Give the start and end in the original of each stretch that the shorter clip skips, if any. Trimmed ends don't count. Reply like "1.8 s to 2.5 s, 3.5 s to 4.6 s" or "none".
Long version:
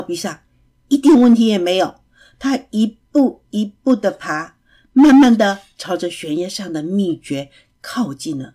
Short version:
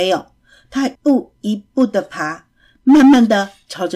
2.6 s to 3.0 s